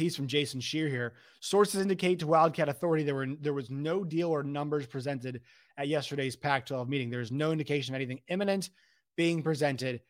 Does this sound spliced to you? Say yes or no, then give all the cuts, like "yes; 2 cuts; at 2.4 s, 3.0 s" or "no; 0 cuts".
no; 0 cuts